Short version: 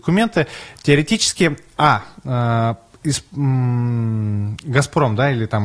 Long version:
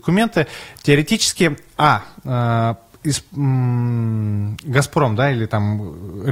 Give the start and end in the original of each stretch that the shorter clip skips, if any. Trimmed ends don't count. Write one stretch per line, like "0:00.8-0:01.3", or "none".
none